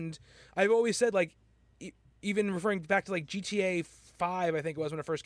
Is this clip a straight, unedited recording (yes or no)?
yes